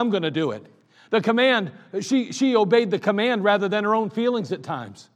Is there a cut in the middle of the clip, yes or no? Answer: no